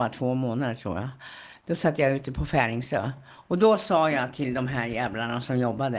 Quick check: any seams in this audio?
no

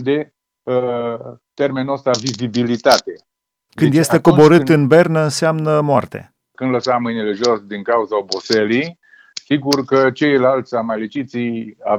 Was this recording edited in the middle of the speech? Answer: yes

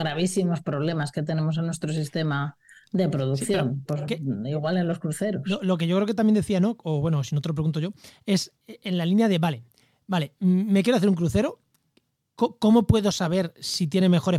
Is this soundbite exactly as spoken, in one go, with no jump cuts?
yes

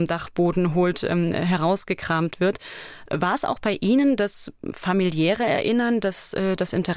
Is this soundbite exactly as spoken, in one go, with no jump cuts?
yes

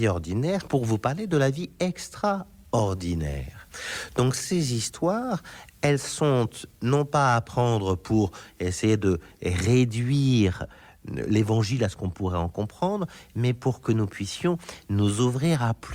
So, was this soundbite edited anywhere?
no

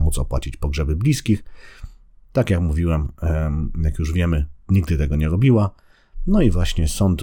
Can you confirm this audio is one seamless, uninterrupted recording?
no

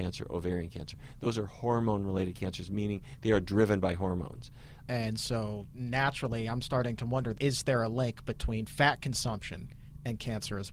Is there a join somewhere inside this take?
yes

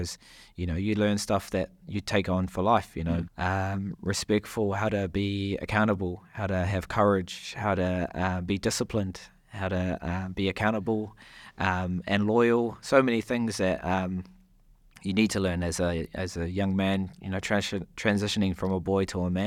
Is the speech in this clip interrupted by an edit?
yes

